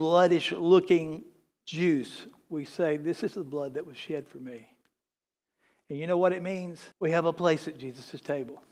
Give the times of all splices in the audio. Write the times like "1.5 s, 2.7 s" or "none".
6.9 s